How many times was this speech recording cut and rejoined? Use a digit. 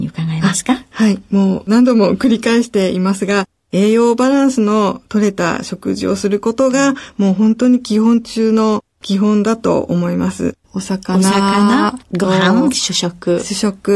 2